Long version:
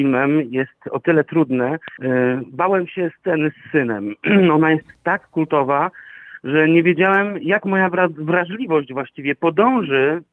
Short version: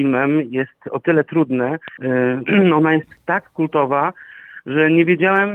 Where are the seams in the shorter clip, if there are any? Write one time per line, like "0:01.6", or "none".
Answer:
0:02.5